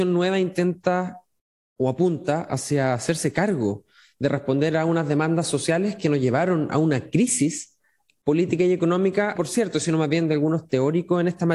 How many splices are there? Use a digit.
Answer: 1